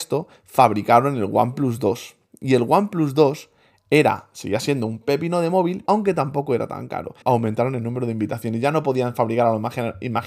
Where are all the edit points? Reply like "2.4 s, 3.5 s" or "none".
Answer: 5.9 s, 7.2 s